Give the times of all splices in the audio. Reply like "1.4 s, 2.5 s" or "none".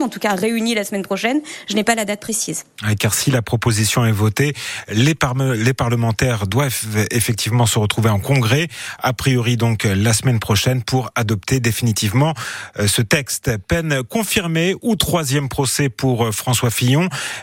none